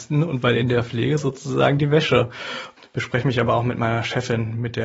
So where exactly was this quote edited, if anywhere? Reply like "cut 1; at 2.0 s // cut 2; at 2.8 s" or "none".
cut 1; at 2.8 s